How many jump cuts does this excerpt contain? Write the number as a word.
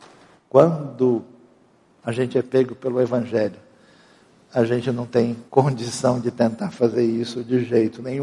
one